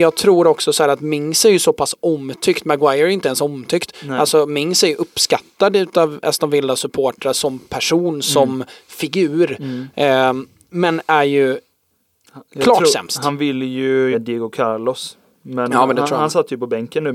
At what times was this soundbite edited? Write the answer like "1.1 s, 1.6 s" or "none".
14.1 s

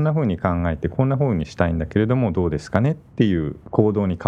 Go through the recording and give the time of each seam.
none

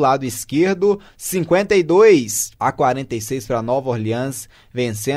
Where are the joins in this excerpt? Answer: 2.6 s

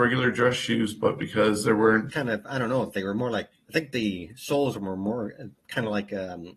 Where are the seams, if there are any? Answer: 2.1 s, 3.5 s, 5.5 s

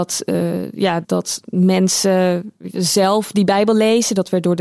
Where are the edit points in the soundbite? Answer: 1.0 s

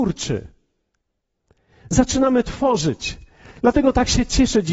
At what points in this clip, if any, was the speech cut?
none

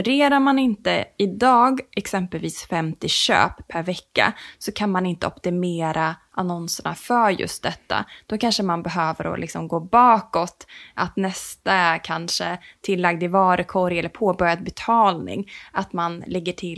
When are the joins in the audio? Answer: none

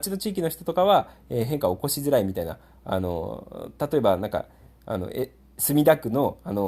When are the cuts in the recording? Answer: none

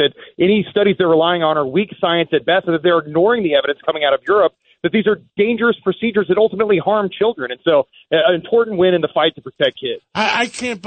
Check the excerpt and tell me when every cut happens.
none

